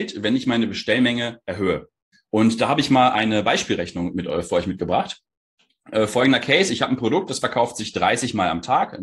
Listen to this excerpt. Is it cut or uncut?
cut